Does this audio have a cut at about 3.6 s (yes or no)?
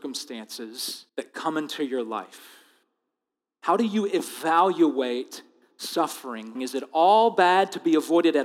no